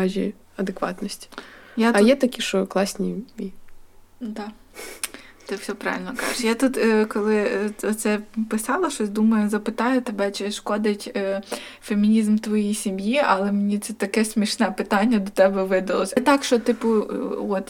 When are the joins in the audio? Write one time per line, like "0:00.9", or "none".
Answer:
0:16.2